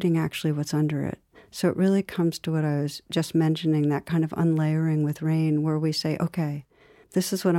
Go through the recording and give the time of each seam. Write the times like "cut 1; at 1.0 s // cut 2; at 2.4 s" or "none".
none